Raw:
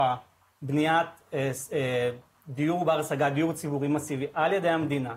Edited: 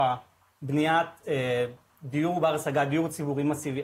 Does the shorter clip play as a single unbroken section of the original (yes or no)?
no